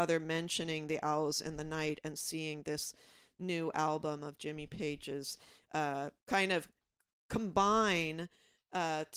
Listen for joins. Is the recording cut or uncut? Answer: uncut